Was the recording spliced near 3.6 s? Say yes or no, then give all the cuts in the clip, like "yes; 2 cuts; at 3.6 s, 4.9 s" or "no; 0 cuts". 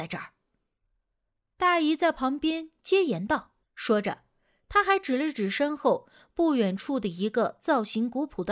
yes; 1 cut; at 3.6 s